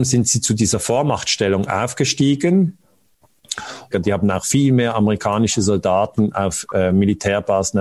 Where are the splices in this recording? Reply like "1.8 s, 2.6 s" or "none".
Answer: 3.9 s